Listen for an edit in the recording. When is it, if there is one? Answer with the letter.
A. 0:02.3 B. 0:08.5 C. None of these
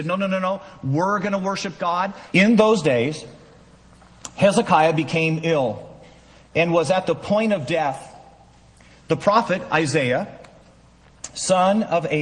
A